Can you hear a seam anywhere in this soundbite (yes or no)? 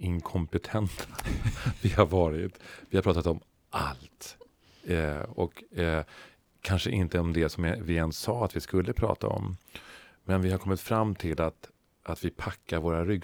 no